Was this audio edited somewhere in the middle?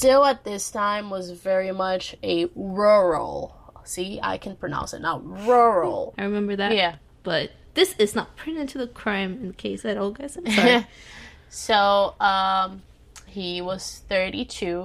yes; 2 cuts; at 6.1 s, 13.3 s

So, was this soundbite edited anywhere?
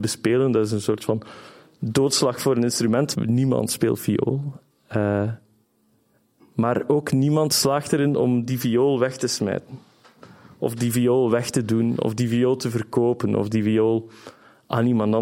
yes; 1 cut; at 3.1 s

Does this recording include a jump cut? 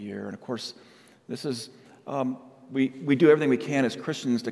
no; 0 cuts

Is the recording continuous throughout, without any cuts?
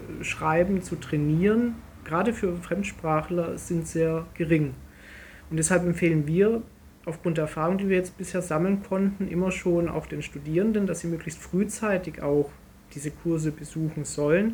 yes; 0 cuts

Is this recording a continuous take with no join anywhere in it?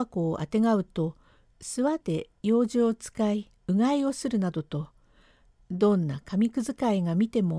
no; 1 cut; at 2.0 s

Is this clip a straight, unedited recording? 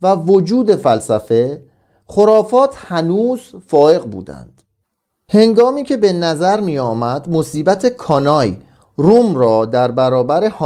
yes; 0 cuts

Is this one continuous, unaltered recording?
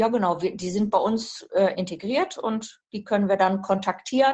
no; 1 cut; at 1.7 s

